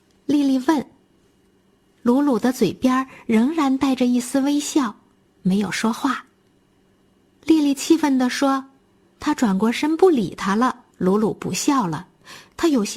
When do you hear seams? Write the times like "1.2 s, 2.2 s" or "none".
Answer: 9.1 s, 10.9 s